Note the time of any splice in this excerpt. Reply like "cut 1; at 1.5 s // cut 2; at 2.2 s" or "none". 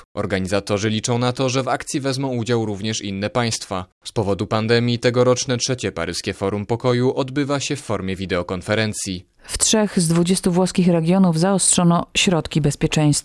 cut 1; at 9.4 s